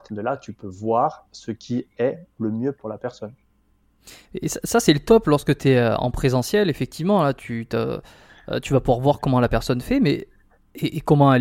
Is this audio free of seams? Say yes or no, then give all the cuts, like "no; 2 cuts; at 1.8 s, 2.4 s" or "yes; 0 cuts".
yes; 0 cuts